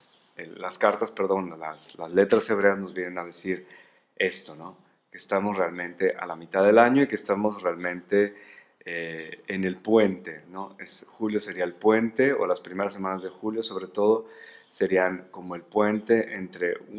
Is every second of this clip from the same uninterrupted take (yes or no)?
yes